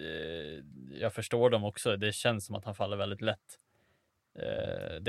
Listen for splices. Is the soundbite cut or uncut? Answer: uncut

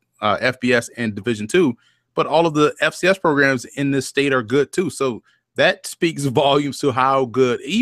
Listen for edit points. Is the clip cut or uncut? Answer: uncut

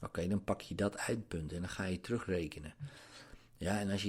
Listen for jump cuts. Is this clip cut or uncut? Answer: uncut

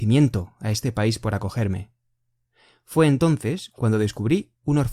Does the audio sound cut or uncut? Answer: uncut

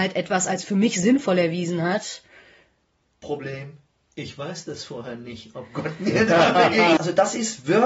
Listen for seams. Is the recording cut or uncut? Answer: cut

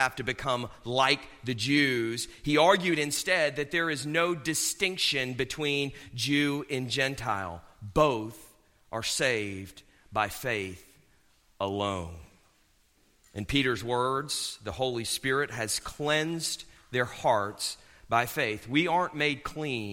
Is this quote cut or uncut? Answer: uncut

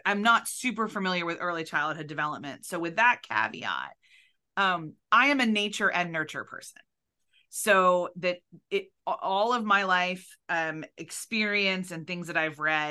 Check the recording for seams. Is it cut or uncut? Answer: uncut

